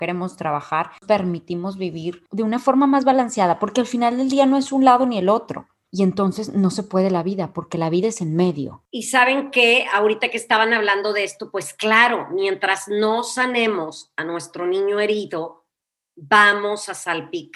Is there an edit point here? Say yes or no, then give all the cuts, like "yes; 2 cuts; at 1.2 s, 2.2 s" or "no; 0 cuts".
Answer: yes; 1 cut; at 5.9 s